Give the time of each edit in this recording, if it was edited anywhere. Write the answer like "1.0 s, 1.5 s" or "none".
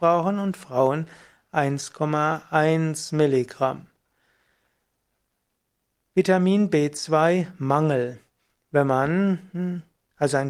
6.0 s